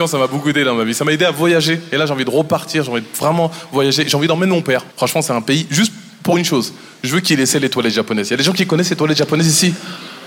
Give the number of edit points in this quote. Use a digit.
1